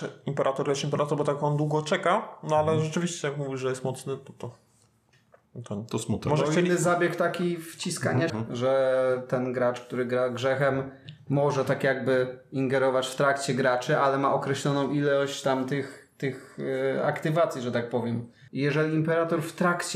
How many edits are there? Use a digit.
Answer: 2